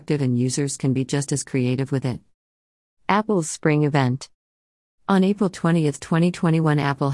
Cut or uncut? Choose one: uncut